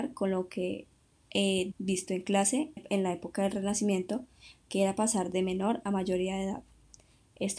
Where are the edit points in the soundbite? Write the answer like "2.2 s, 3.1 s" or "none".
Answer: 1.7 s, 2.8 s